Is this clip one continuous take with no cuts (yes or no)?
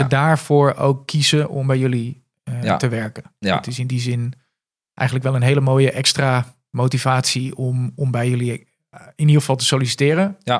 yes